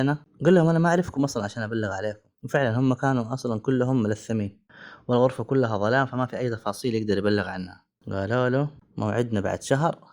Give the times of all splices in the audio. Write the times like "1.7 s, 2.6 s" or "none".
2.4 s